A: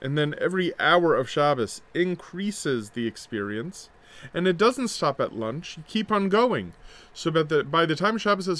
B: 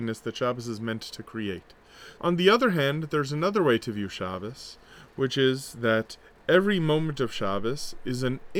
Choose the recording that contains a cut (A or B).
B